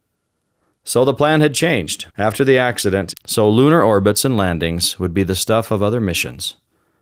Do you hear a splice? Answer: yes; 2 cuts; at 2.1 s, 3.1 s

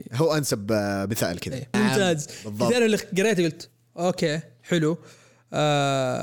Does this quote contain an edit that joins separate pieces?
yes; 1 cut; at 1.7 s

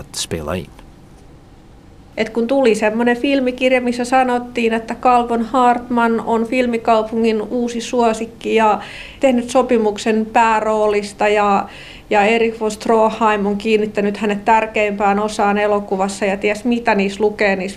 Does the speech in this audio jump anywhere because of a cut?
yes; 1 cut; at 2.1 s

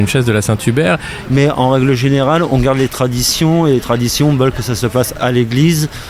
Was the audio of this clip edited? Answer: yes; 1 cut; at 1.2 s

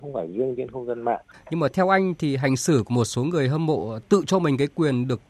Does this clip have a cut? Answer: yes; 1 cut; at 1.3 s

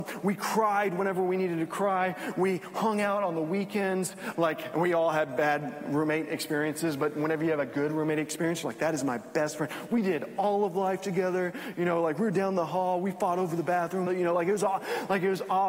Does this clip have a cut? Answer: yes; 2 cuts; at 4.3 s, 14.1 s

